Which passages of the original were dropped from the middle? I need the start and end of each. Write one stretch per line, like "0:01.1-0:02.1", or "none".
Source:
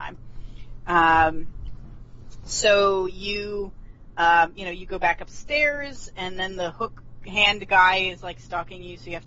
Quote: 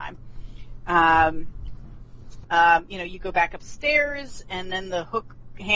0:02.4-0:04.1